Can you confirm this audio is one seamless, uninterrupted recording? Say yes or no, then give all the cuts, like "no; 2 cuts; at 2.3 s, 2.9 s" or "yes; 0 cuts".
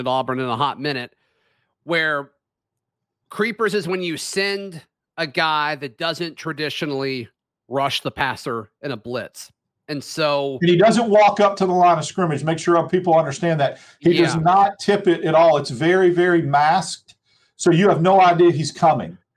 yes; 0 cuts